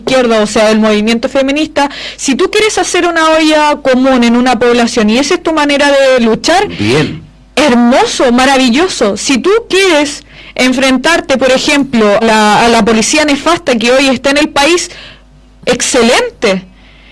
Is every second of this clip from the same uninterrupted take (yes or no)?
no